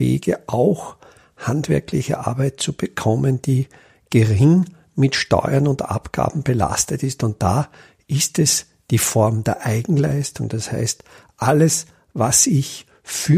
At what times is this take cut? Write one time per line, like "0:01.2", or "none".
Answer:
none